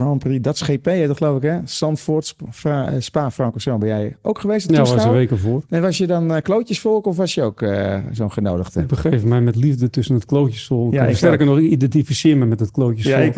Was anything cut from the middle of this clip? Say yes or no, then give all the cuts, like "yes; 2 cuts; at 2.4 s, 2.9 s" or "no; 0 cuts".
no; 0 cuts